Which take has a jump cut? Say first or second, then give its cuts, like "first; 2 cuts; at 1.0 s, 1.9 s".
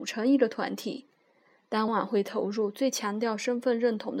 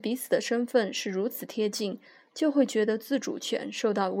first; 1 cut; at 1.9 s